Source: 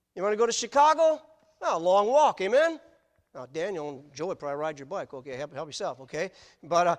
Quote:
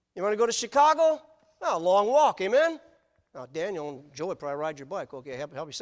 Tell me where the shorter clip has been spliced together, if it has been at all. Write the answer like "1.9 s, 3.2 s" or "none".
none